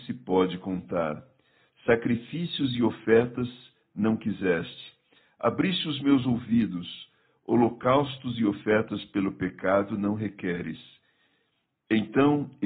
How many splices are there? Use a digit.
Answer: 0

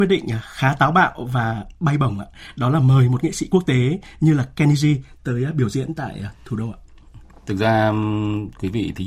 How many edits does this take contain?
0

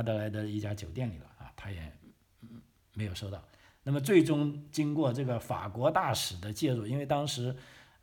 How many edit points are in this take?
0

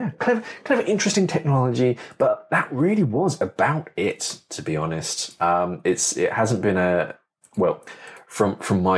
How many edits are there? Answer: 0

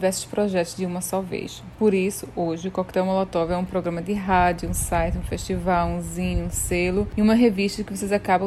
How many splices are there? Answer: 0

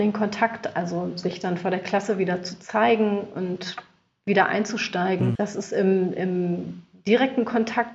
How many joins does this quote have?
1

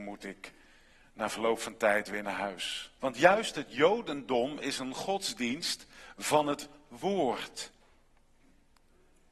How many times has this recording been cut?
1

